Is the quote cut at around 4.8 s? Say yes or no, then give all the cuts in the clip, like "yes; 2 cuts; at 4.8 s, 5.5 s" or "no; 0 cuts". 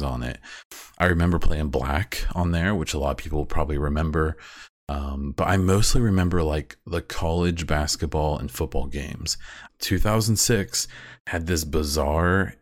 no; 1 cut; at 9.7 s